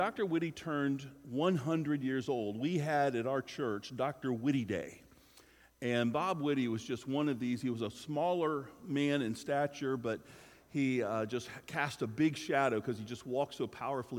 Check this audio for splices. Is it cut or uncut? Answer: uncut